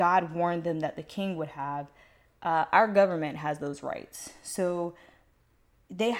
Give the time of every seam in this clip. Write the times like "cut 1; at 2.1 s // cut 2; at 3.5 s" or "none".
none